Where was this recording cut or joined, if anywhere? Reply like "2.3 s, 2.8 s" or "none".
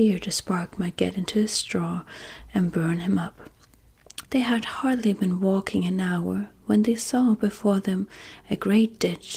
4.2 s